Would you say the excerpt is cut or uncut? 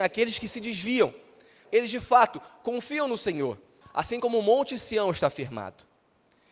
cut